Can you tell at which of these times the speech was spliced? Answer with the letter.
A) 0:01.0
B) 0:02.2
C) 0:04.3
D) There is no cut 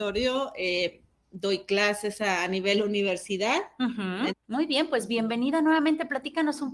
C